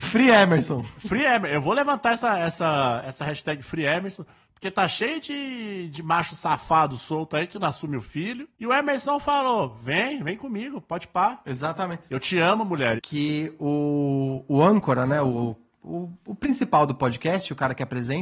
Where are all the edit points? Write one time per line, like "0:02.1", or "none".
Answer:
0:13.0